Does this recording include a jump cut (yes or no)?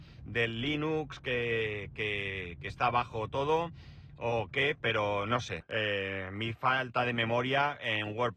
yes